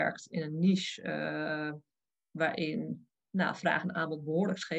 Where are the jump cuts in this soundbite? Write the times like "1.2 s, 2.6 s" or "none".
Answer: none